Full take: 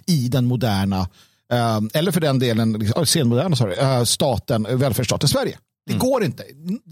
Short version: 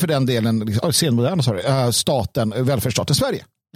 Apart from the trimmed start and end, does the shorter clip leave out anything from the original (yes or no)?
no